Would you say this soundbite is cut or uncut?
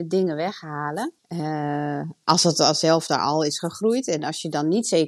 cut